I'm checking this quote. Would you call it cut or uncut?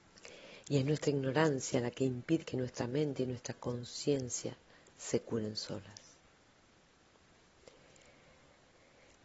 cut